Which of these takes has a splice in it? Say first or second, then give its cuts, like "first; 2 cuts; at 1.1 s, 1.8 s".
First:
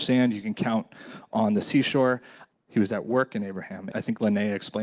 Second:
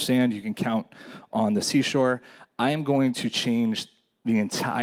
first; 2 cuts; at 2.5 s, 3.9 s